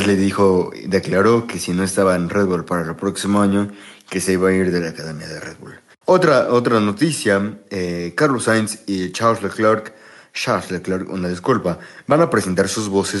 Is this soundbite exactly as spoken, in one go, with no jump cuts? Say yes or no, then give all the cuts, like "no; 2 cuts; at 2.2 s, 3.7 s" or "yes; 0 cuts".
no; 1 cut; at 6.0 s